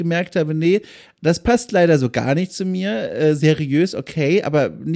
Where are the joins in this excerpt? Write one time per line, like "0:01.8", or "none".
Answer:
none